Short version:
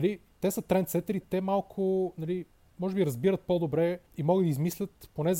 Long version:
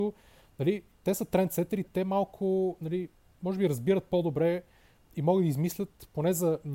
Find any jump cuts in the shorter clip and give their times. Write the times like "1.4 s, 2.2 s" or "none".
4.1 s